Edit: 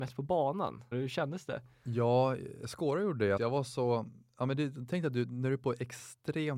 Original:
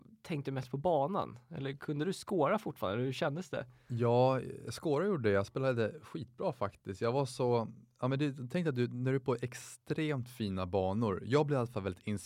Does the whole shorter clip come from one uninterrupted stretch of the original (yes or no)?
no